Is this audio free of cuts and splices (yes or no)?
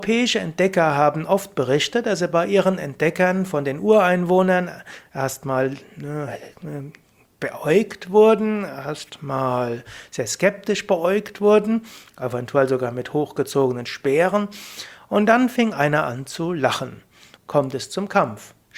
no